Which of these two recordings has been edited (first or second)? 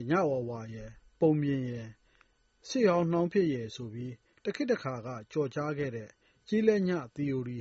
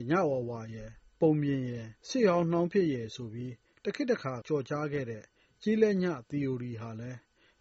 second